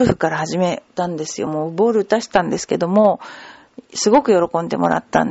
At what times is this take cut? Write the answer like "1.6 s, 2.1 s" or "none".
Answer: none